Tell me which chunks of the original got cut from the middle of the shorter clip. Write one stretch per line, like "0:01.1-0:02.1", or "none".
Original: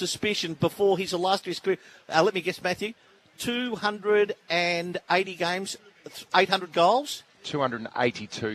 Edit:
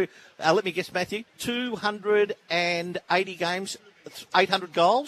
0:03.0-0:03.3